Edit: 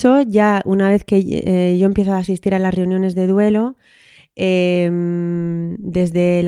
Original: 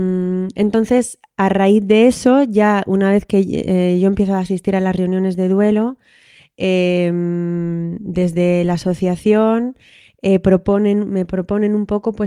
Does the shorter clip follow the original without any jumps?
yes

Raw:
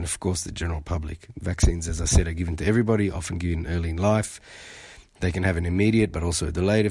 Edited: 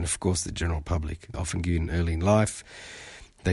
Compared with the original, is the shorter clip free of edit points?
no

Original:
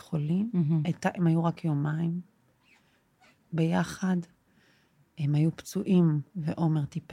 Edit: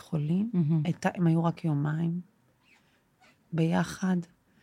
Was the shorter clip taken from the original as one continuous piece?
yes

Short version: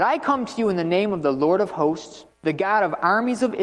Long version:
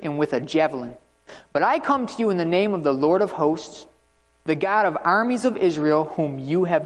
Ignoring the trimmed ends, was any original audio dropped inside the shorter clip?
yes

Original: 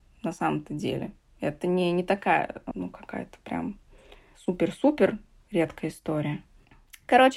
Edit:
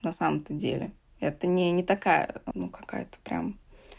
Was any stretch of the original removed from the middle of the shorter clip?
no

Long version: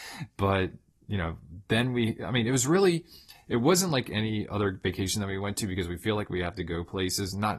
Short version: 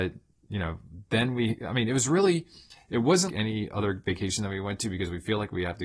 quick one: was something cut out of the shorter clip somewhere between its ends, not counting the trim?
yes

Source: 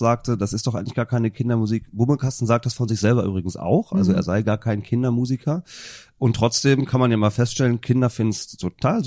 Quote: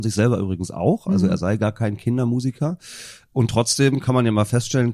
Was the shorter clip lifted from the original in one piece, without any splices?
yes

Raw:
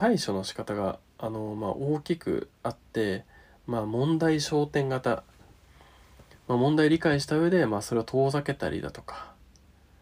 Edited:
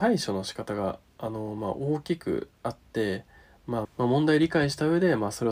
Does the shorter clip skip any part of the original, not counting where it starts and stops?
yes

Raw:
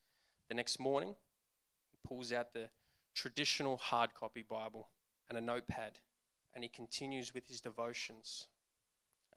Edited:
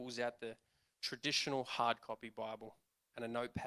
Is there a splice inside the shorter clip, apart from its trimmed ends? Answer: no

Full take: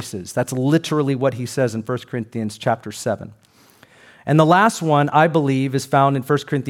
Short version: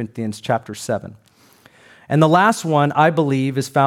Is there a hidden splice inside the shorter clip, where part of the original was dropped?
no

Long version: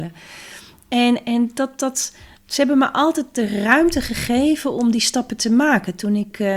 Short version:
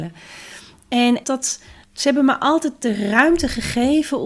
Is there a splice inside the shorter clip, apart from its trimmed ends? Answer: yes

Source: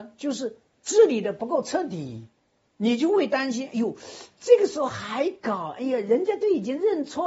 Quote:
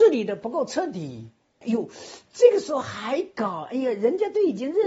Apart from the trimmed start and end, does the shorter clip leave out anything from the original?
yes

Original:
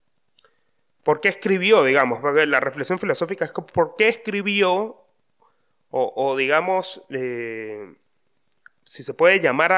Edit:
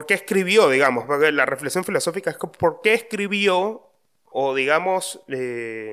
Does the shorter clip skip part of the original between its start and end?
yes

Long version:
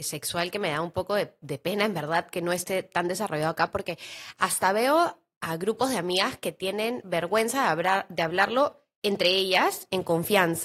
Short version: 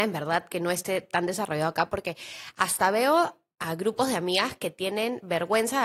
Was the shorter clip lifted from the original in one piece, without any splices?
yes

